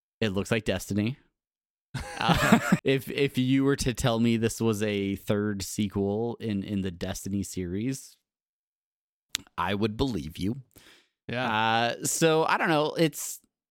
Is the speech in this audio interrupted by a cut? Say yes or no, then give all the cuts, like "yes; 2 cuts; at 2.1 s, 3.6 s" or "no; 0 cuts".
yes; 1 cut; at 2.8 s